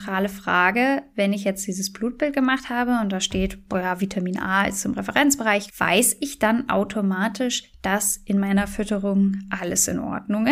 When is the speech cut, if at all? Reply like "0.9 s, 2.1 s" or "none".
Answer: 5.7 s